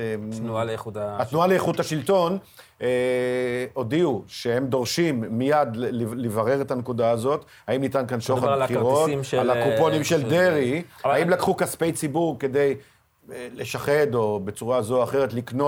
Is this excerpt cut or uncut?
uncut